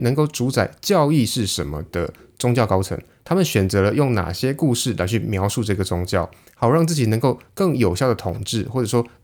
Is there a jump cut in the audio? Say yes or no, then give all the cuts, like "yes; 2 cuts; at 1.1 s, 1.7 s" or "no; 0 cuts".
no; 0 cuts